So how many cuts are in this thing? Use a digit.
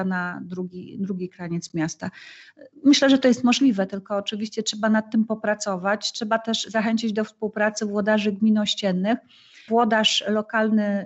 1